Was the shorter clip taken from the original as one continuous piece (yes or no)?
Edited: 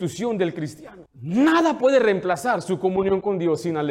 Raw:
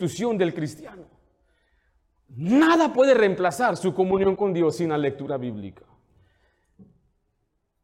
no